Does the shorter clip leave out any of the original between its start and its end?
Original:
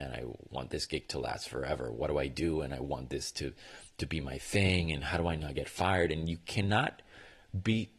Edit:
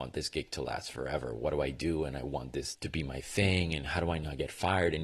yes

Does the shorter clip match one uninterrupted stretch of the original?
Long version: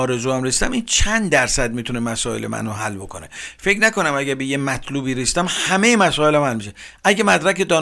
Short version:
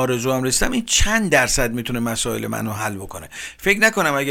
yes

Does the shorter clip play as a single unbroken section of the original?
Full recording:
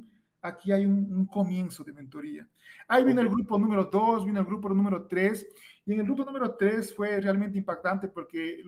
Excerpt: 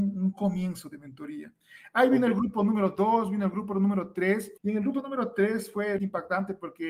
no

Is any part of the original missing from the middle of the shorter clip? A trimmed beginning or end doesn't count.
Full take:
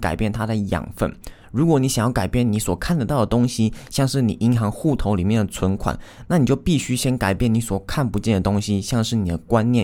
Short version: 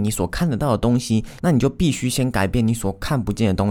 yes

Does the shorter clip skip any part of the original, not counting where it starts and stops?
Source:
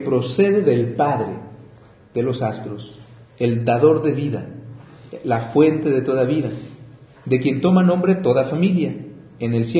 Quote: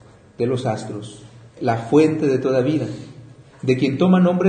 yes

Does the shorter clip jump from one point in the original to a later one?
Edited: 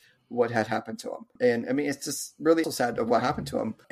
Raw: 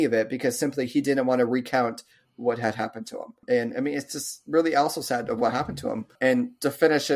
yes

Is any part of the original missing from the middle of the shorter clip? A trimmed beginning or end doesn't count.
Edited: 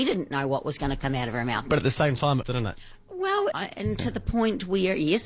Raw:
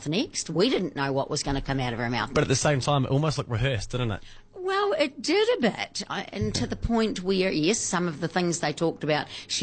yes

